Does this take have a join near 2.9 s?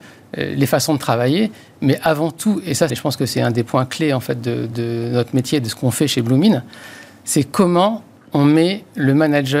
yes; 1 cut; at 2.9 s

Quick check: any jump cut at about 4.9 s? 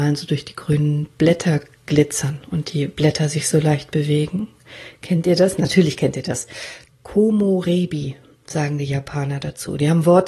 no; 1 cut; at 6.9 s

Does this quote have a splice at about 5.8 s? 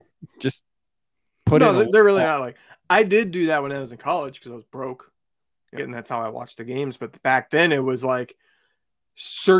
yes; 1 cut; at 5.8 s

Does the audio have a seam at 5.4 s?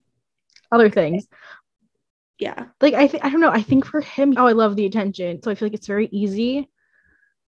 yes; 2 cuts; at 4.3 s, 5.4 s

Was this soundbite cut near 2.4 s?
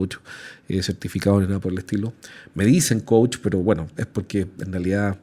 no; 1 cut; at 3.9 s

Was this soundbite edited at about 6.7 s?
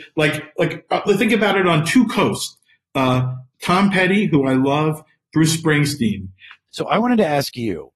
yes; 1 cut; at 6.7 s

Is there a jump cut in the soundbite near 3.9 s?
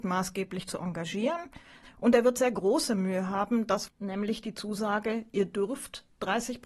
yes; 2 cuts; at 1.8 s, 3.9 s

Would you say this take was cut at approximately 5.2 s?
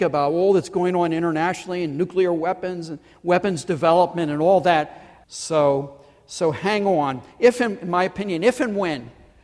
yes; 1 cut; at 5.2 s

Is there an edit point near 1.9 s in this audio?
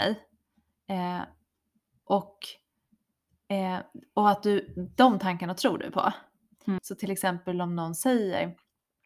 no; 1 cut; at 6.8 s

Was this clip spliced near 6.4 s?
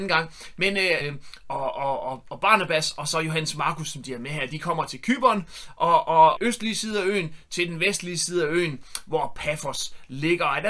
yes; 2 cuts; at 1.0 s, 6.4 s

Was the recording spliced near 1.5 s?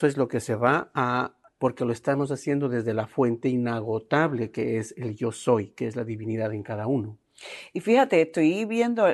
yes; 1 cut; at 1.5 s

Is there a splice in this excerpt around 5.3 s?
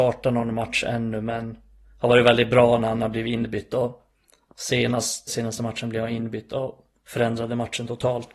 yes; 1 cut; at 5.3 s

